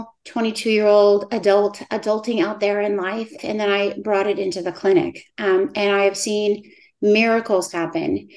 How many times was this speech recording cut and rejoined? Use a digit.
1